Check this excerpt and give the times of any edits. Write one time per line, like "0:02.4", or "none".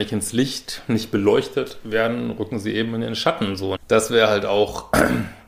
0:03.8